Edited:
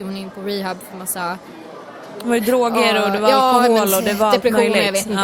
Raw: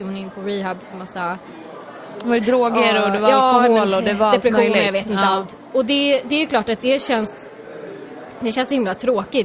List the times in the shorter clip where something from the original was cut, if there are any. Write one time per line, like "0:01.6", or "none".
none

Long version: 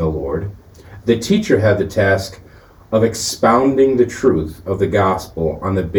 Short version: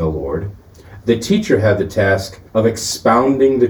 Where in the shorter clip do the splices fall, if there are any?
0:02.5

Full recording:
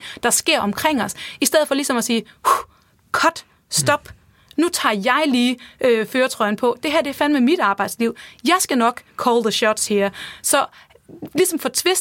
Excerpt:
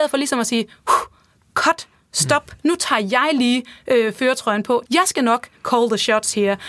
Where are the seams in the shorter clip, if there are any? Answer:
0:02.6
0:04.9

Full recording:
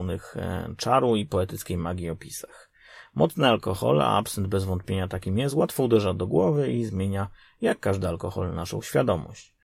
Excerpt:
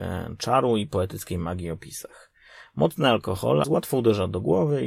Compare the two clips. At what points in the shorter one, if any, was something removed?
0:03.6

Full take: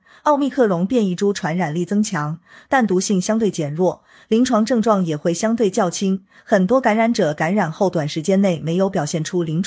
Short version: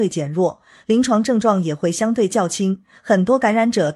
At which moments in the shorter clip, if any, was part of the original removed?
none

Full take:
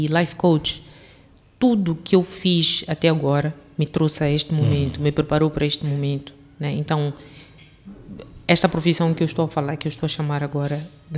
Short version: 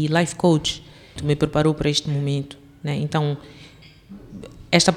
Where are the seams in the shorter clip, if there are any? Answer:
0:01.2

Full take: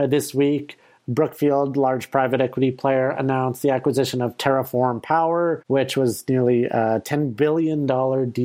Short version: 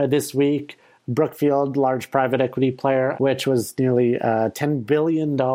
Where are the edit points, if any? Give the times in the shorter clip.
0:03.1

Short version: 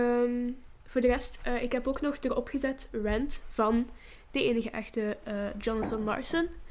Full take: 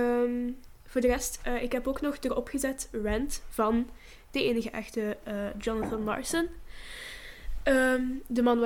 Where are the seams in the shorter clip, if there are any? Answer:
none

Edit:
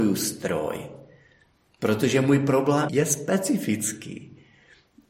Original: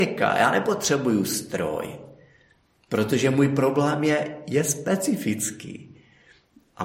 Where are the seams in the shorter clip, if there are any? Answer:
0:02.9

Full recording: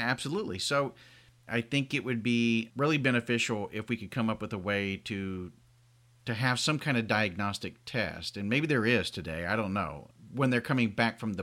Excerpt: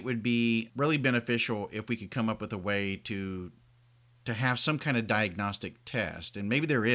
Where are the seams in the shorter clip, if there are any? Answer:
none

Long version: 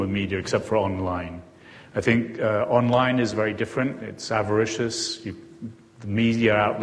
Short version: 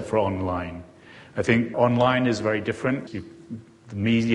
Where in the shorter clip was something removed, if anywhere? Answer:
0:01.7
0:03.1

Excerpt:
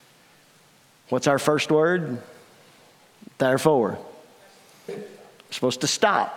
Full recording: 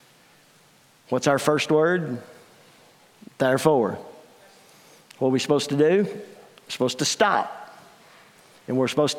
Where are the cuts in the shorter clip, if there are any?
0:04.9

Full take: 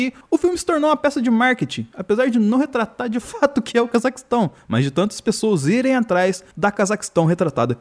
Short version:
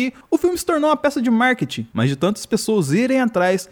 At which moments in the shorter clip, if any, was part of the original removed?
0:01.9

